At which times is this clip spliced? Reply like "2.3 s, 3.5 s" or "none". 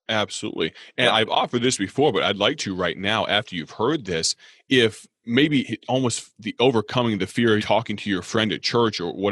5.6 s, 7.6 s